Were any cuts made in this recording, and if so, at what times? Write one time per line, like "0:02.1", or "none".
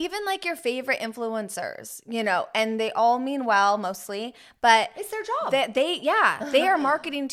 none